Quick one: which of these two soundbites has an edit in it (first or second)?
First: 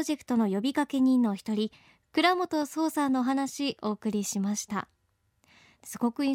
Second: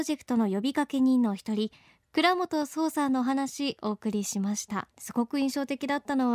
second